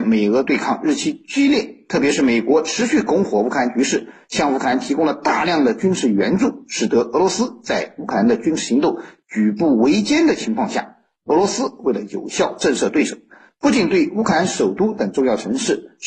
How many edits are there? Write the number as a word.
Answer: zero